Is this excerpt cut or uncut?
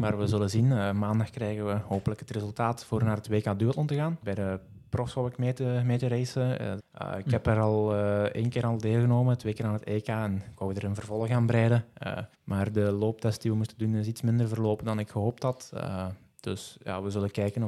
cut